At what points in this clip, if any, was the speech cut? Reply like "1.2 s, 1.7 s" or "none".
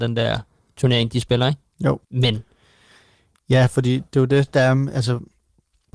2.0 s